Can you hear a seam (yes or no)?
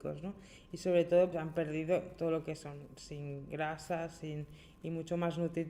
yes